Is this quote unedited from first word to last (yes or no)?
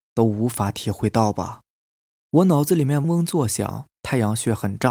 no